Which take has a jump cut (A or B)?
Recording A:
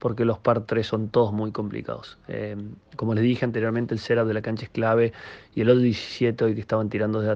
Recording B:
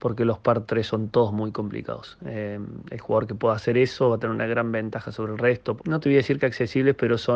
B